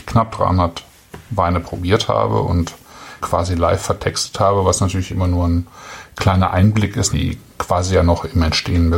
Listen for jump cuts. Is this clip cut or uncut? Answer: cut